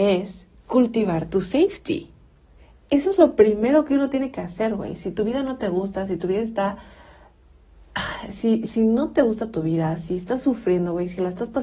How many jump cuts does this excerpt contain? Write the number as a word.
one